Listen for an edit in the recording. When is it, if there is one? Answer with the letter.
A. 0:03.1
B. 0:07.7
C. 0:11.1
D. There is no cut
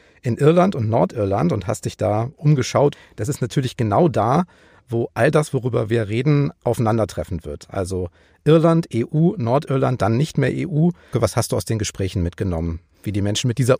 C